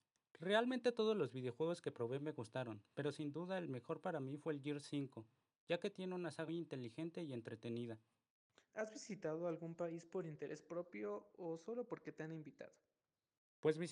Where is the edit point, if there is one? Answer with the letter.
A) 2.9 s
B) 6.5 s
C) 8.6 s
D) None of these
B